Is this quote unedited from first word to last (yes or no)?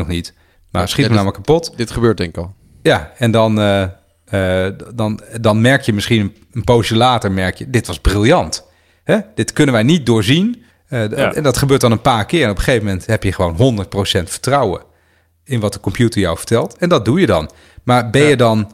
no